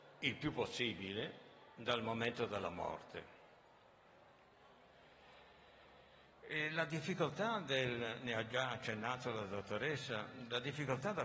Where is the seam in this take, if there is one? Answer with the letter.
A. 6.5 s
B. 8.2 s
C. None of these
C